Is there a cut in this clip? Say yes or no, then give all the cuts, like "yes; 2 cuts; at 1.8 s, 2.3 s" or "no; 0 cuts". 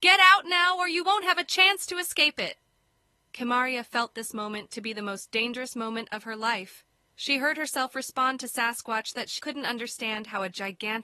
yes; 1 cut; at 9.4 s